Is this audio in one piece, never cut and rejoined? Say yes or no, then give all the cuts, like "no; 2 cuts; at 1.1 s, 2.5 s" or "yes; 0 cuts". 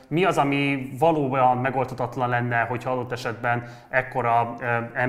yes; 0 cuts